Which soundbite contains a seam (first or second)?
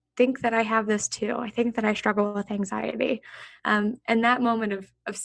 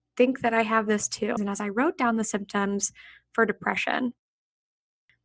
second